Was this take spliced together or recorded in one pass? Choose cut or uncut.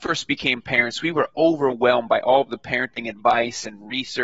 uncut